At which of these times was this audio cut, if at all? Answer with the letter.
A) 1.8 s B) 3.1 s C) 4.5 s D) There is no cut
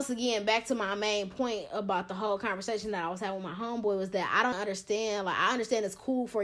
C